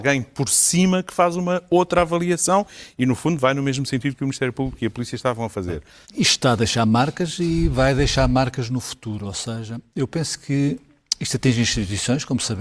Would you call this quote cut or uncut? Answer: cut